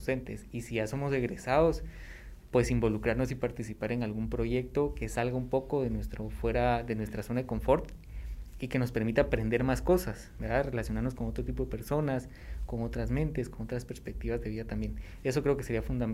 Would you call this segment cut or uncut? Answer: uncut